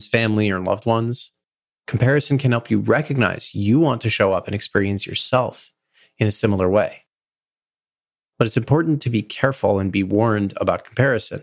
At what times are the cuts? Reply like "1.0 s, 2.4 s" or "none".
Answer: 1.8 s